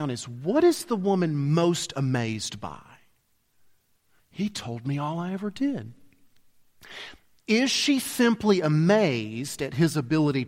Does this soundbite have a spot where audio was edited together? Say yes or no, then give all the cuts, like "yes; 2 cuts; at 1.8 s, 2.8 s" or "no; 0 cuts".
yes; 1 cut; at 4.2 s